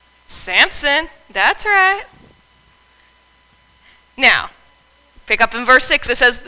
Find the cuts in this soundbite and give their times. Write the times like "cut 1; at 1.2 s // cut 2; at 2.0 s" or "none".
none